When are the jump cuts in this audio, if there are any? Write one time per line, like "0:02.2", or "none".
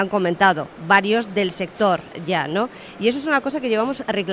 none